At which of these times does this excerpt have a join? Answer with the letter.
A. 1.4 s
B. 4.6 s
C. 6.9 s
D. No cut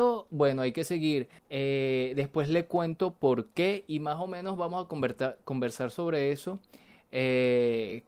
A